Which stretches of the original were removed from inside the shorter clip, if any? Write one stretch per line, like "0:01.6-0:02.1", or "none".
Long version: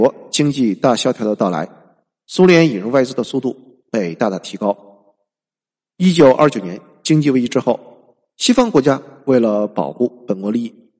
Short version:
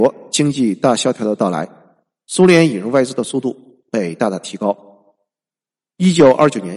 none